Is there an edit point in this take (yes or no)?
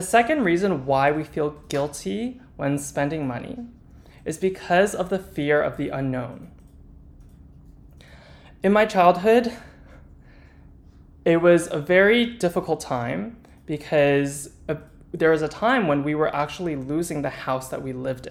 no